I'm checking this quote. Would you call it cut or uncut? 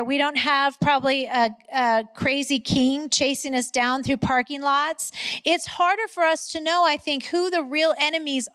uncut